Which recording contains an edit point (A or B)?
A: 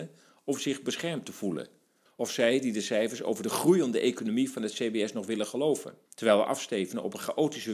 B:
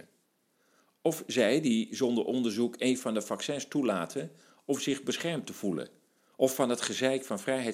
A